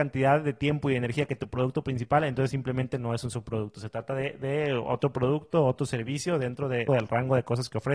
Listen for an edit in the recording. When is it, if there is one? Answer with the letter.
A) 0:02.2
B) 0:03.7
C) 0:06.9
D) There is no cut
C